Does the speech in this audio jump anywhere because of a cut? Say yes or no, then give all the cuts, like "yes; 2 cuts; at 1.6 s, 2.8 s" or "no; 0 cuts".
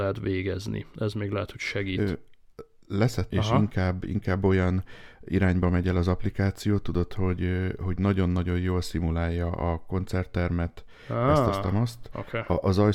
yes; 1 cut; at 3.3 s